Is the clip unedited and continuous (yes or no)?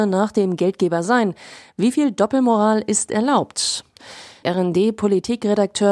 no